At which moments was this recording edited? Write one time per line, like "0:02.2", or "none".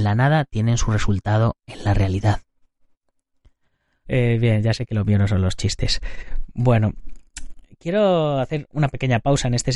0:04.0